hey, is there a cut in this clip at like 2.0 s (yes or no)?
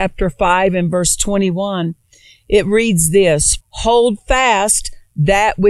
no